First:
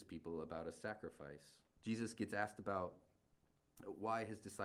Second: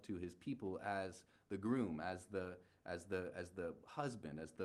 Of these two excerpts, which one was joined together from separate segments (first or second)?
first